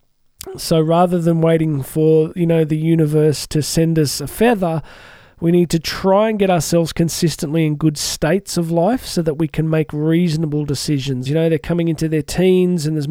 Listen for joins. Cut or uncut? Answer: cut